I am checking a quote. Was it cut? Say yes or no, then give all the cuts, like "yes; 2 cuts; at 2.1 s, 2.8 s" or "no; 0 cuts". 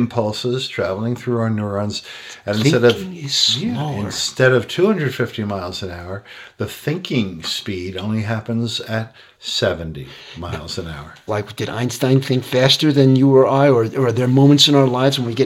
yes; 1 cut; at 11.3 s